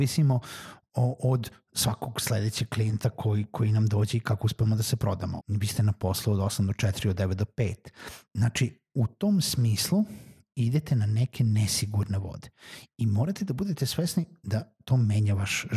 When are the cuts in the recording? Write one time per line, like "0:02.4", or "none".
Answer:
0:05.4
0:08.3